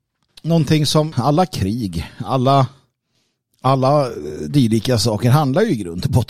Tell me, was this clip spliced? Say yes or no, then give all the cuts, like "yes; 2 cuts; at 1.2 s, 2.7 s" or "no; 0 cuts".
yes; 1 cut; at 1.1 s